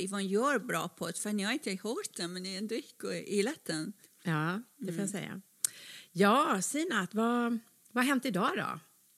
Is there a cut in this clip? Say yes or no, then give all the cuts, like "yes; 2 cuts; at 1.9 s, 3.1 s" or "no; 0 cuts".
yes; 1 cut; at 4.0 s